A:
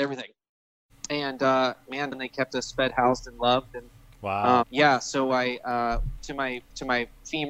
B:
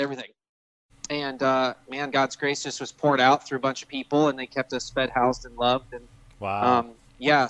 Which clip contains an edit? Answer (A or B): A